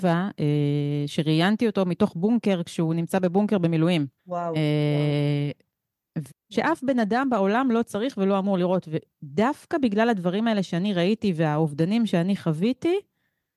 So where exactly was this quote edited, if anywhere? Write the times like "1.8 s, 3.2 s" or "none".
4.2 s, 6.3 s